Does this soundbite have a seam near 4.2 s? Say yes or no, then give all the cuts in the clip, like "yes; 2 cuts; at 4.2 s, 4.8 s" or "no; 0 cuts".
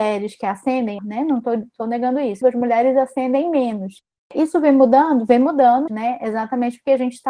no; 3 cuts; at 1.0 s, 2.4 s, 5.9 s